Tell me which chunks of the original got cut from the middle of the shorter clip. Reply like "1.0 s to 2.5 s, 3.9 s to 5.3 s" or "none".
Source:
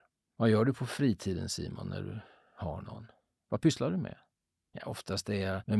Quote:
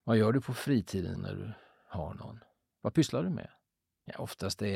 1.5 s to 1.8 s